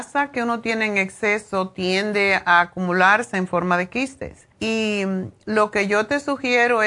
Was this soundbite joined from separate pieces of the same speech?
yes; 1 cut; at 4.5 s

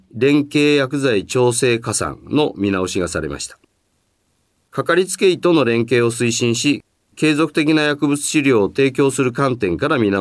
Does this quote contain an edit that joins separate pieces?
no; 0 cuts

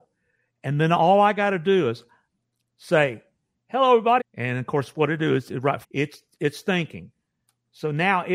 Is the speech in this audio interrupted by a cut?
yes; 2 cuts; at 4.2 s, 5.8 s

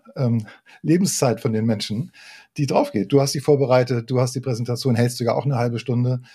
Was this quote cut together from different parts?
no; 0 cuts

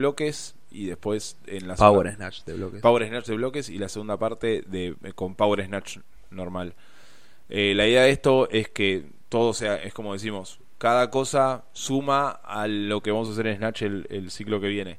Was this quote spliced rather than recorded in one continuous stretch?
no; 0 cuts

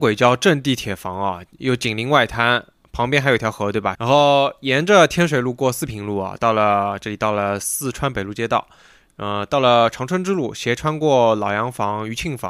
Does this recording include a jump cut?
yes; 1 cut; at 3.9 s

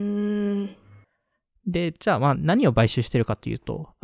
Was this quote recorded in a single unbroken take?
yes; 0 cuts

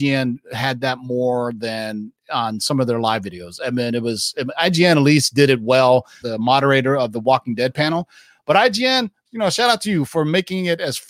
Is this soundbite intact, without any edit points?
no; 1 cut; at 6.2 s

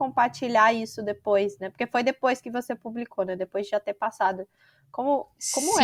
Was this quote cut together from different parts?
no; 0 cuts

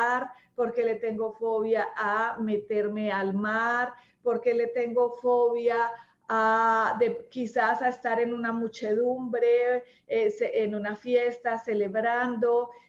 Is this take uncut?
yes; 0 cuts

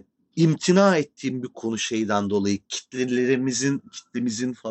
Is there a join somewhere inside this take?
no; 0 cuts

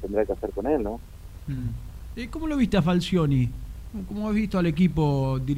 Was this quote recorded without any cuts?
yes; 0 cuts

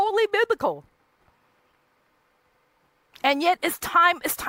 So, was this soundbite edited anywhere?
yes; 1 cut; at 3.6 s

